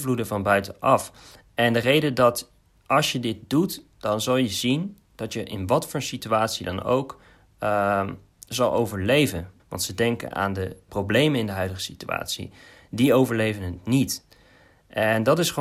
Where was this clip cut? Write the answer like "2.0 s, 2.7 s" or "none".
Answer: 9.6 s, 10.9 s